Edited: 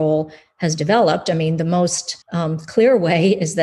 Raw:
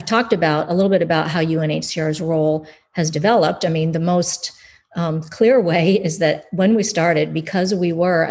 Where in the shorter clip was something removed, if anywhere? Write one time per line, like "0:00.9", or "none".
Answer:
0:02.2